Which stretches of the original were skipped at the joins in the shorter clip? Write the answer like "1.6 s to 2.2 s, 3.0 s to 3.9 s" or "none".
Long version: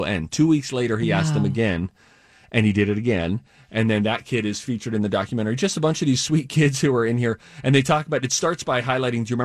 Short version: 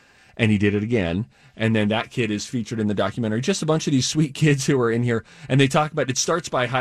none